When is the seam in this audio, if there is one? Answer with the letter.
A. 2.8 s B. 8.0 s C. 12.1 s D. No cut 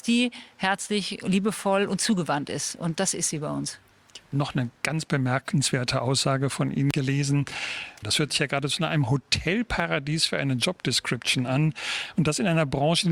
B